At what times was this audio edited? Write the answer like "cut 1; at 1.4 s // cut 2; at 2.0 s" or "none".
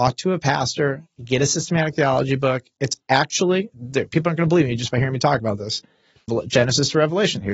cut 1; at 6.3 s